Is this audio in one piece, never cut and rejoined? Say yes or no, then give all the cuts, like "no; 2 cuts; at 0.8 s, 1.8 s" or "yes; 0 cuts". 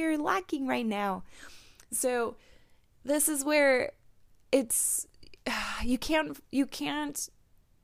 yes; 0 cuts